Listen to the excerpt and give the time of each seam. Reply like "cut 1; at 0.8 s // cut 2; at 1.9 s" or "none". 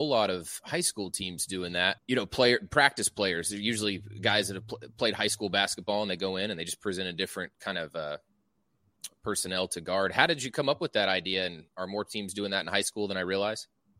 cut 1; at 2.0 s